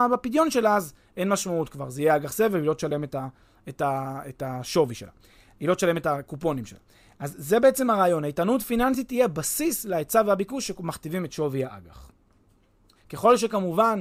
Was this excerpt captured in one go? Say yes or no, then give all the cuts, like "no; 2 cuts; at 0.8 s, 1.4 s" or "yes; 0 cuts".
no; 1 cut; at 13.0 s